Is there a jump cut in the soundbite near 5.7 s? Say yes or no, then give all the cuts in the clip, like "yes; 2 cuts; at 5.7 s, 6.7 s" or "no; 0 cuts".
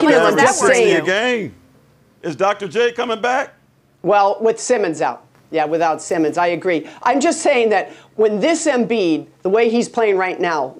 no; 0 cuts